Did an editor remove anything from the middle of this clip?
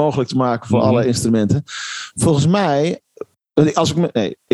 no; 0 cuts

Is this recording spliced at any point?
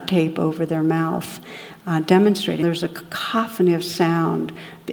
yes; 1 cut; at 2.6 s

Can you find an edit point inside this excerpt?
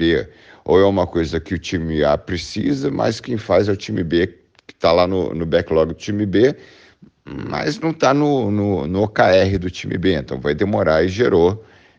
no; 0 cuts

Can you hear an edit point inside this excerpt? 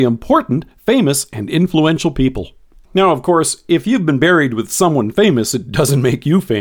yes; 1 cut; at 2.8 s

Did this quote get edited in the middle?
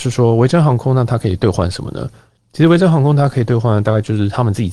no; 0 cuts

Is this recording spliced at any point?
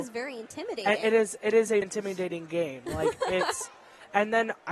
yes; 1 cut; at 1.8 s

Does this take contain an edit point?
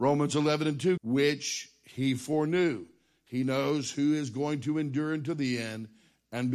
yes; 1 cut; at 1.0 s

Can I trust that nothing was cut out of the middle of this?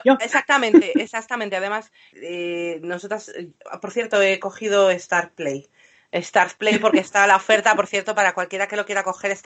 no; 1 cut; at 2.1 s

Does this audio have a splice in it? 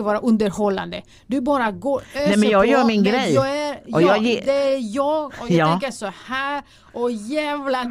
no; 0 cuts

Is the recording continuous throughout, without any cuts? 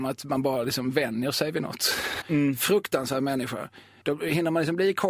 no; 2 cuts; at 2.2 s, 4.0 s

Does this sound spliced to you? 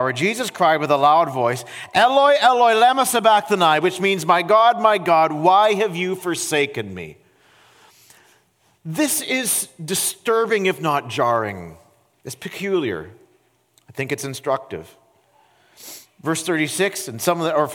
yes; 1 cut; at 12.2 s

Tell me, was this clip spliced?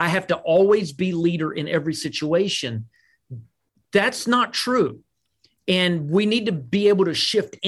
no; 0 cuts

